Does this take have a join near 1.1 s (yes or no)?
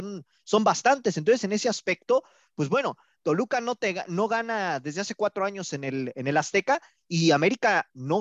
no